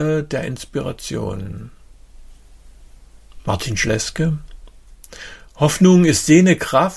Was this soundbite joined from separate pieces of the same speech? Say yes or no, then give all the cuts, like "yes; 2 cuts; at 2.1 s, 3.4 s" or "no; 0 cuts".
no; 0 cuts